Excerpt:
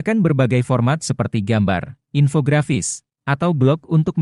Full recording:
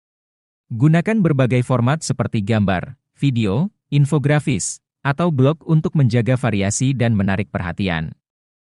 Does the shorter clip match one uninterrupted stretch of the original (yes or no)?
no